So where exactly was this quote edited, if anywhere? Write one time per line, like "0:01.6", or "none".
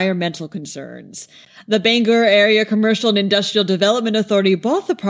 none